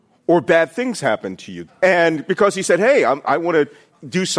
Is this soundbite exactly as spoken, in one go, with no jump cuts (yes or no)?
no